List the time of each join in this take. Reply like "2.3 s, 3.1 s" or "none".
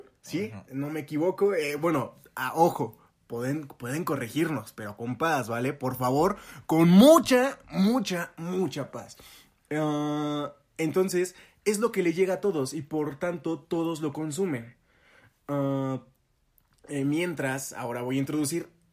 none